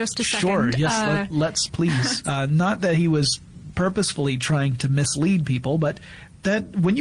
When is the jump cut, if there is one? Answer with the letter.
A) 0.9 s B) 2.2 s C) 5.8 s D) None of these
B